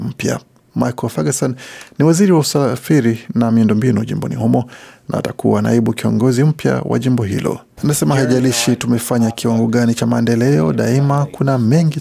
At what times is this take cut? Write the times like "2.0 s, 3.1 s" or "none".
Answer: 7.8 s